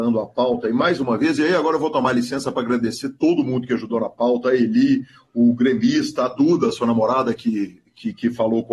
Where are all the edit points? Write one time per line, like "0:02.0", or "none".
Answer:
none